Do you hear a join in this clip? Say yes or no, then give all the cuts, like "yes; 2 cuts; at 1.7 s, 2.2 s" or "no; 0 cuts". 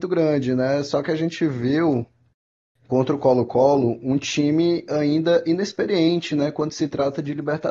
no; 0 cuts